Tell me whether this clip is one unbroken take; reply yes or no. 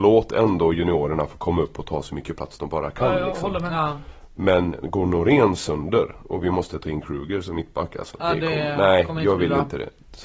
yes